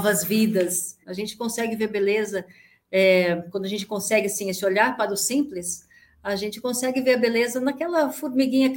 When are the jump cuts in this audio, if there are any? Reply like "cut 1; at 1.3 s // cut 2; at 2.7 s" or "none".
cut 1; at 1.0 s